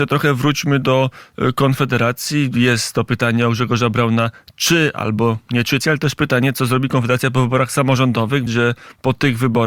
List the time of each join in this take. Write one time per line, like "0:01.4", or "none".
0:05.8
0:08.5